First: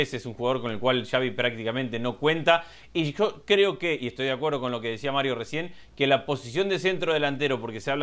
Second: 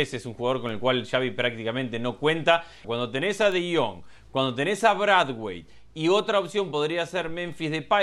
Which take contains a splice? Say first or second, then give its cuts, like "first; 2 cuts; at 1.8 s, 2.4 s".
second; 1 cut; at 2.8 s